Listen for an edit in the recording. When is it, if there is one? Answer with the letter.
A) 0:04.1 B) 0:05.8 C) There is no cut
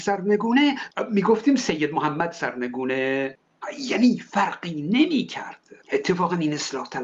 B